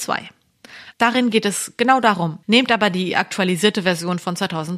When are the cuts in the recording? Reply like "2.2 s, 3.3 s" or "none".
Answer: 0.9 s, 2.4 s